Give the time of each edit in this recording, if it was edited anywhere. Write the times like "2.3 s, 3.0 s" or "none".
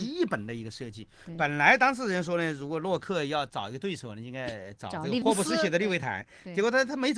none